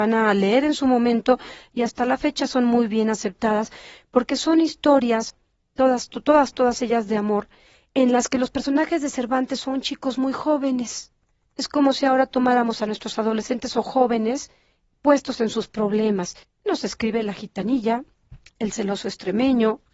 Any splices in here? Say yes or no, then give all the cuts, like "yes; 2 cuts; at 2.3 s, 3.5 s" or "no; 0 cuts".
yes; 2 cuts; at 16.4 s, 18.5 s